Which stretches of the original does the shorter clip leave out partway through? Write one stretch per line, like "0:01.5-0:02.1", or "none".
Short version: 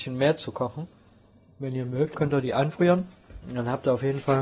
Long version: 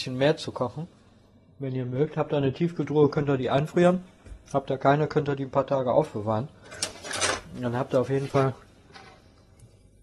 0:02.1-0:03.1
0:04.4-0:07.5